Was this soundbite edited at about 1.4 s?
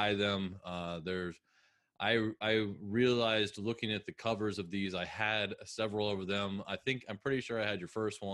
no; 0 cuts

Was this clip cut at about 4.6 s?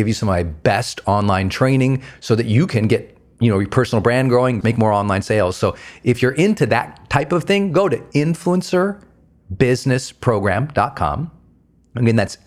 yes; 1 cut; at 4.6 s

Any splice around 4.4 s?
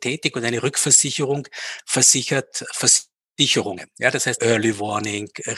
yes; 1 cut; at 4.4 s

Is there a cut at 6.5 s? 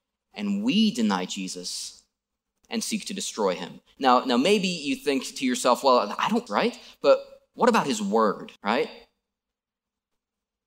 yes; 2 cuts; at 6.5 s, 8.6 s

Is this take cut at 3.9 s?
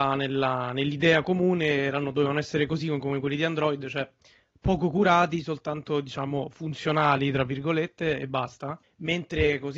no; 0 cuts

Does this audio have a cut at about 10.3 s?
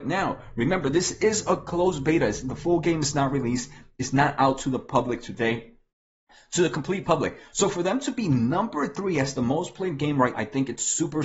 yes; 1 cut; at 10.3 s

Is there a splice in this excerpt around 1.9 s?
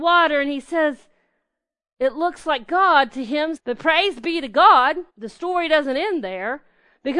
no; 2 cuts; at 3.6 s, 5.1 s

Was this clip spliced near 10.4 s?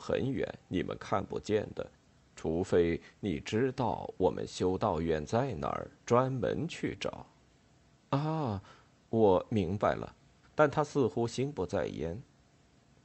yes; 1 cut; at 10.4 s

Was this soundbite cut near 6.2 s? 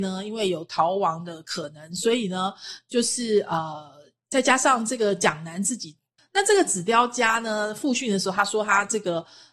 yes; 1 cut; at 6.2 s

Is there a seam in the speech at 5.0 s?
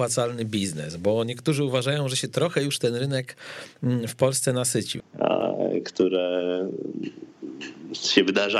yes; 1 cut; at 5.0 s

